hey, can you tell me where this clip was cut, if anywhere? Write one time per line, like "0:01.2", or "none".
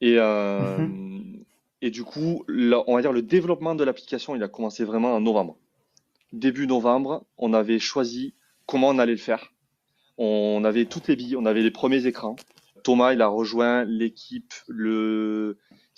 0:12.8